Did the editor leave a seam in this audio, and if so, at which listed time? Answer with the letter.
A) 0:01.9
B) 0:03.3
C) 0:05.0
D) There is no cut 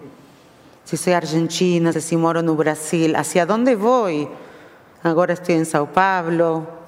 A